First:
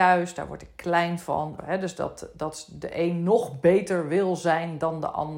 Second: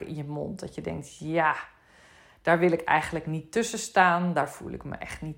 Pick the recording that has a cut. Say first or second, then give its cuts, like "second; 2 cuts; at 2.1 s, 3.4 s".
first; 1 cut; at 1.6 s